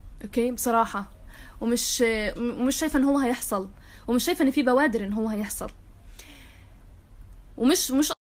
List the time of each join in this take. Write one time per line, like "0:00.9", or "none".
0:02.4